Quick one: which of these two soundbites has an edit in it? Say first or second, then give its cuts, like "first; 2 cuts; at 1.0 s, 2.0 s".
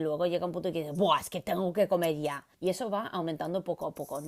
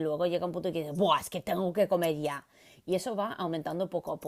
first; 1 cut; at 2.5 s